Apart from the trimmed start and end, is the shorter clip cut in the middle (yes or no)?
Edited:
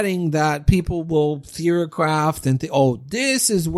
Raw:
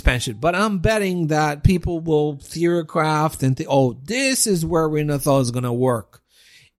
no